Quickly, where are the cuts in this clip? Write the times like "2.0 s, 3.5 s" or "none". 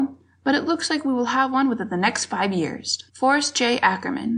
3.1 s

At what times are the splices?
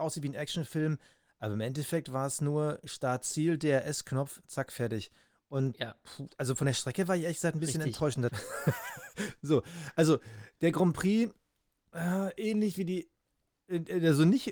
8.3 s

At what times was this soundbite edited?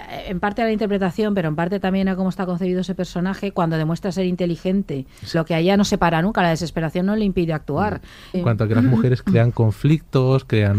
5.3 s, 8.3 s

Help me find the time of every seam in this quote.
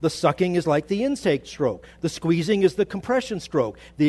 none

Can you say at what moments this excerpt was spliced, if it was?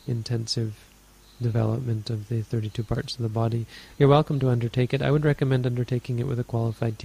none

